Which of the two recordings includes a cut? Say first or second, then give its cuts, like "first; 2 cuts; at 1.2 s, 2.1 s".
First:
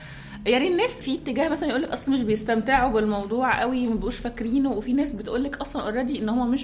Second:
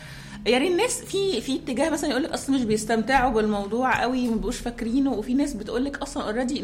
first; 1 cut; at 1.0 s